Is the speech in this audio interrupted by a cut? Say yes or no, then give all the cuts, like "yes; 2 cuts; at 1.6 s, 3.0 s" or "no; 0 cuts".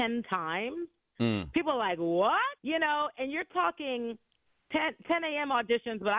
yes; 1 cut; at 2.6 s